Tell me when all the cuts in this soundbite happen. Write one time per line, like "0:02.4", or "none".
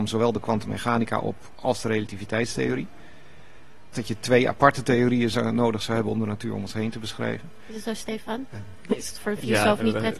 0:03.9